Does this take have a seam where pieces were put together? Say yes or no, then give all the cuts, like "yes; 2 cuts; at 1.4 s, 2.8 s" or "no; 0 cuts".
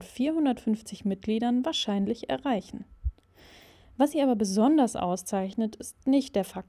no; 0 cuts